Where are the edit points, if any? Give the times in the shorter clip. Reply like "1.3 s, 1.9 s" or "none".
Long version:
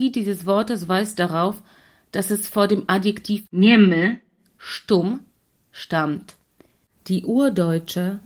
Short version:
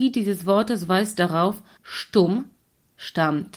1.8 s

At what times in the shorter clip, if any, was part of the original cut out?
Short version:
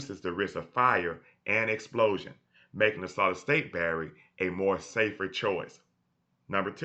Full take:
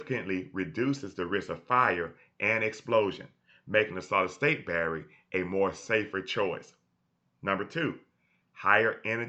none

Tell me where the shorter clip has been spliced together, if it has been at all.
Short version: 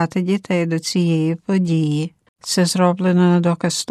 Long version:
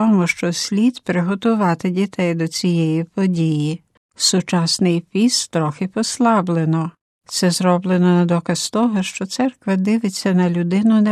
2.3 s

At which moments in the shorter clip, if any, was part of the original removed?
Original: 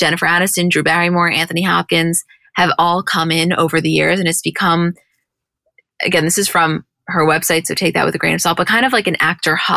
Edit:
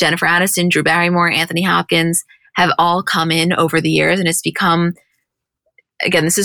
none

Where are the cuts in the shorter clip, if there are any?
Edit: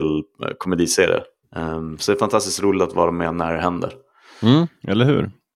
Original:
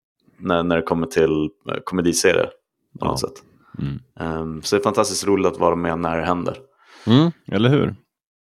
1.4 s

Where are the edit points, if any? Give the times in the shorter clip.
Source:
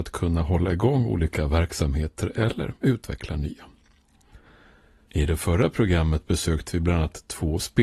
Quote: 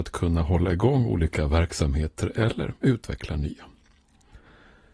none

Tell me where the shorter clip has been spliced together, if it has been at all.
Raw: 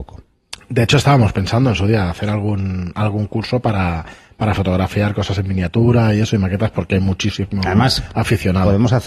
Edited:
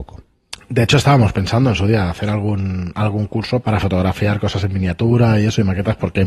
3.6 s

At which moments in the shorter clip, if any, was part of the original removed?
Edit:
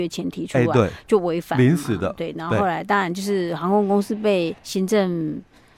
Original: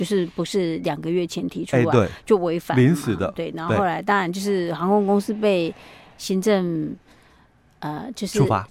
4.6 s

